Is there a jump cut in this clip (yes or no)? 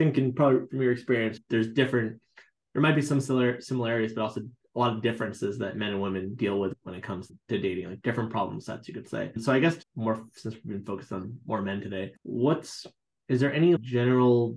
yes